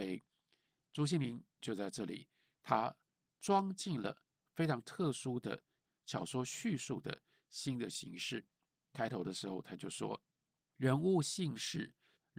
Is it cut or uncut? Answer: uncut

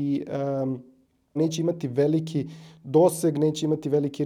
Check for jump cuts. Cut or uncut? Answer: cut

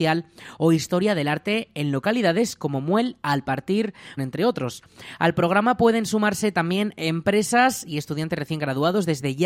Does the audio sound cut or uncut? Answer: cut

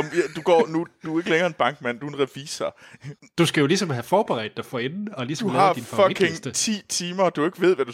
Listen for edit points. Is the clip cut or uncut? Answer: cut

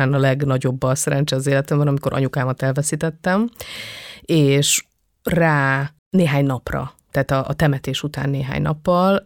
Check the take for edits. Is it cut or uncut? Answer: cut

